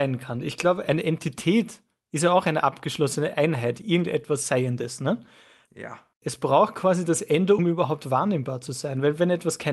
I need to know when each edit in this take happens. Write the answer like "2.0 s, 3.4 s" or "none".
6.2 s, 7.6 s